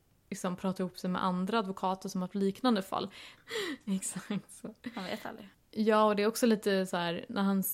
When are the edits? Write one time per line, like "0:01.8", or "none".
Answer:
0:03.4
0:05.5